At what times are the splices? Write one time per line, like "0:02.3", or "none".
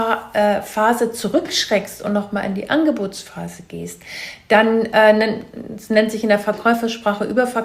none